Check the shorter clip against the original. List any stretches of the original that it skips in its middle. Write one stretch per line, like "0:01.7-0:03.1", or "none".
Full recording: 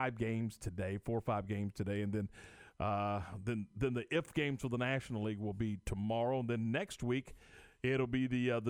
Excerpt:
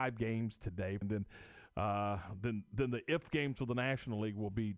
0:01.0-0:02.0